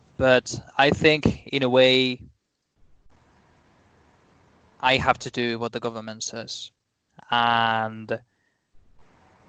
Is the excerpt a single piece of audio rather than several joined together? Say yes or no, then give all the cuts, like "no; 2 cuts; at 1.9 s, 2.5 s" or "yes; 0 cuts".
yes; 0 cuts